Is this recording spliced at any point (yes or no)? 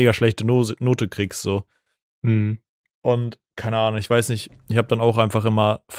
no